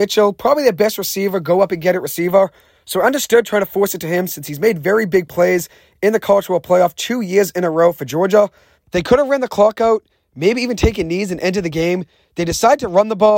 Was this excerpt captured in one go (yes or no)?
no